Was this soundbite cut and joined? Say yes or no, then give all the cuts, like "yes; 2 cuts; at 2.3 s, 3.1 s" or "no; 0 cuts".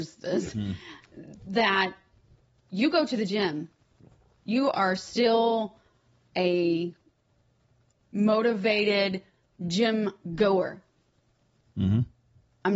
no; 0 cuts